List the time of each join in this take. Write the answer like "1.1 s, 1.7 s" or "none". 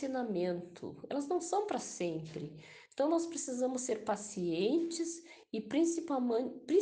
none